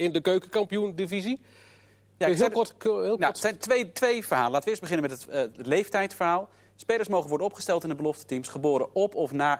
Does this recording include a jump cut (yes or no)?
no